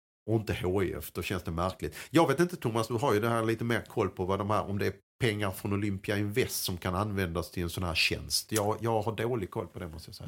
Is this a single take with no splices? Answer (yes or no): yes